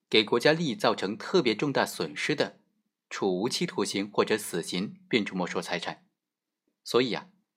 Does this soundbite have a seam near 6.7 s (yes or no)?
yes